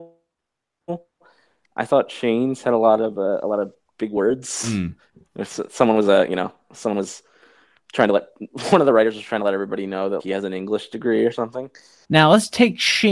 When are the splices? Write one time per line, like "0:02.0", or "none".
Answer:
0:10.2
0:12.0